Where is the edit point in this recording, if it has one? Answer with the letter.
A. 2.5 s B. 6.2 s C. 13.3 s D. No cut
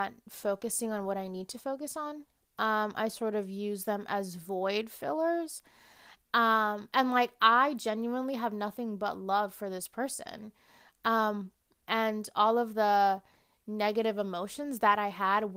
B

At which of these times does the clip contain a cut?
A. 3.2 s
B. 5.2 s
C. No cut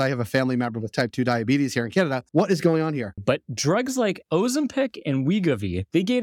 A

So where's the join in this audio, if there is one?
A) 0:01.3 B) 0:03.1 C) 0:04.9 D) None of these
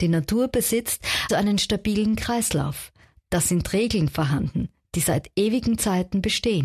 A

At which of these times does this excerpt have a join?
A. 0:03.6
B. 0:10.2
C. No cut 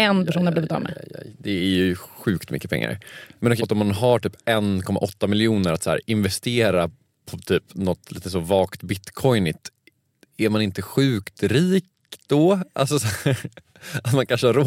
A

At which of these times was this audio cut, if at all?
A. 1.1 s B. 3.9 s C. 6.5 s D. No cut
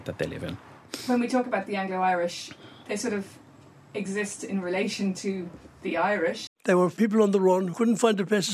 C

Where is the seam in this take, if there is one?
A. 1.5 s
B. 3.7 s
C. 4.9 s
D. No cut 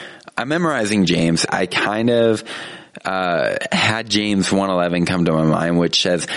A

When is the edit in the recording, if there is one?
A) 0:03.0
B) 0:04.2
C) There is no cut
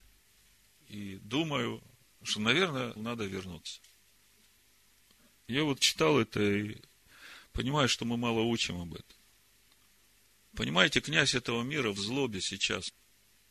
A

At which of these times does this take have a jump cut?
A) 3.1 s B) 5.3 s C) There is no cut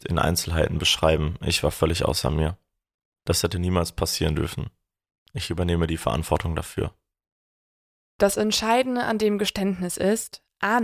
A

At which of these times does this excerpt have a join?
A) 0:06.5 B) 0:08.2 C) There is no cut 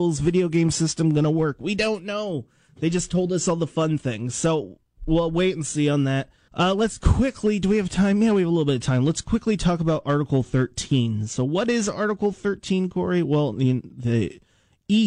A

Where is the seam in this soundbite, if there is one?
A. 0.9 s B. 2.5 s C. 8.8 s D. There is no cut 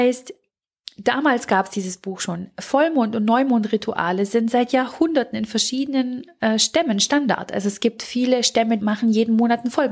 C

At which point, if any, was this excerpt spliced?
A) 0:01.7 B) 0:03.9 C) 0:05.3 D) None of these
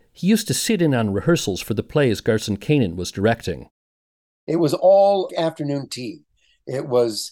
C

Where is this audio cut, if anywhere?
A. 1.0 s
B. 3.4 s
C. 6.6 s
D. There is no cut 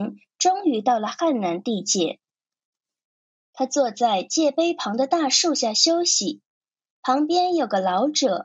D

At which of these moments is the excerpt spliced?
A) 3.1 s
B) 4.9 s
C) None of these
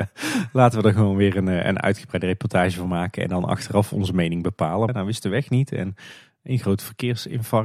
B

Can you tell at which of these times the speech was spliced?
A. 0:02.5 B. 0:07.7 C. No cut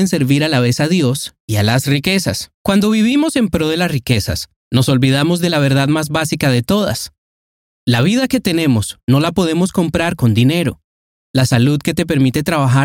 A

